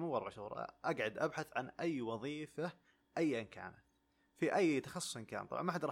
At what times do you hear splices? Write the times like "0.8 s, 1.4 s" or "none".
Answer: none